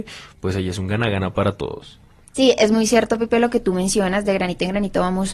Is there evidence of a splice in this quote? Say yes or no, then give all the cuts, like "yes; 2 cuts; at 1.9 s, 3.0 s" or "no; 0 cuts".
no; 0 cuts